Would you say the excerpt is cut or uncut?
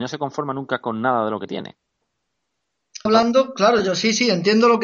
cut